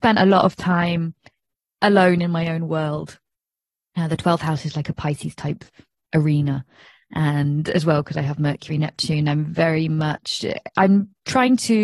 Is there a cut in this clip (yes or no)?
no